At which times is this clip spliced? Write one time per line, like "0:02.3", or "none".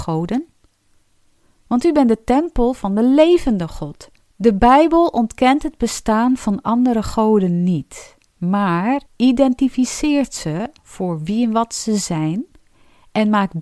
0:04.2
0:09.1